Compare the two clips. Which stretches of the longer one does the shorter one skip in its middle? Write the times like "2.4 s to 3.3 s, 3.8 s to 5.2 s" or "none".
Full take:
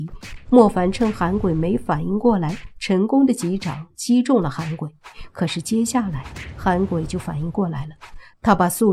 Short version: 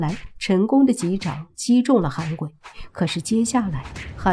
none